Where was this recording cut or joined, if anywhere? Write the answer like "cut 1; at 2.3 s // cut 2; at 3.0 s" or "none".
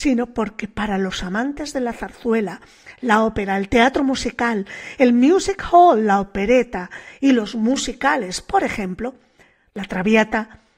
none